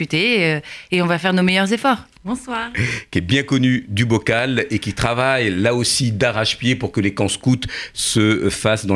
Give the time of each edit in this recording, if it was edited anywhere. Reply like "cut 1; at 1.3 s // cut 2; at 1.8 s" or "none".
cut 1; at 2.2 s

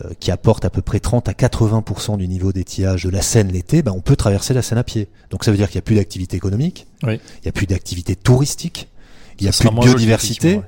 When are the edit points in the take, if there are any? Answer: cut 1; at 3.0 s

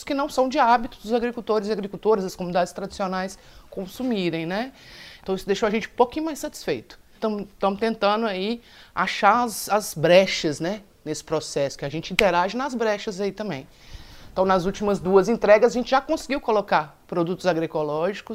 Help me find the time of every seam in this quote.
cut 1; at 5.2 s // cut 2; at 7.2 s

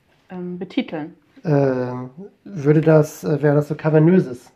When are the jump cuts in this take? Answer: cut 1; at 1.4 s

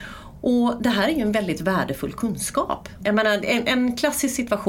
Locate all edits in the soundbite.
cut 1; at 3.0 s

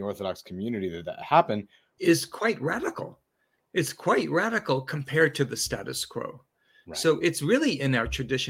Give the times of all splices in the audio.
cut 1; at 2.0 s

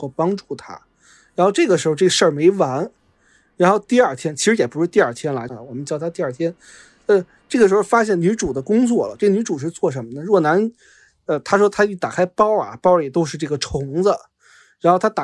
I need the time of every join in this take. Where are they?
cut 1; at 5.5 s

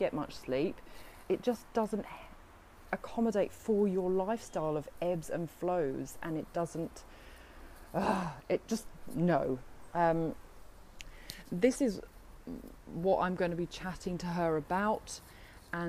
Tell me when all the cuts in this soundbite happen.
cut 1; at 1.3 s

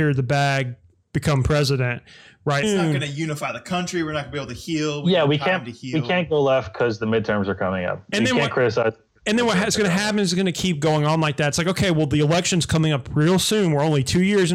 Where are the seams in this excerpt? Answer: cut 1; at 2.6 s

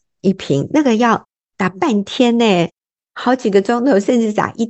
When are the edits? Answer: none

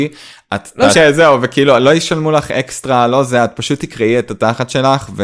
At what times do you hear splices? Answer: cut 1; at 0.9 s

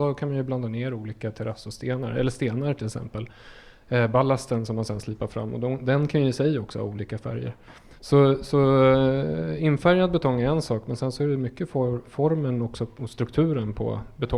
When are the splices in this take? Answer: none

